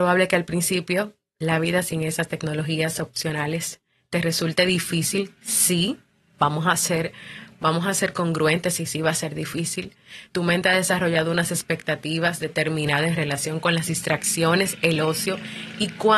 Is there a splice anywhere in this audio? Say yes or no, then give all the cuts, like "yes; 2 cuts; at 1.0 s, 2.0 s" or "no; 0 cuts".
no; 0 cuts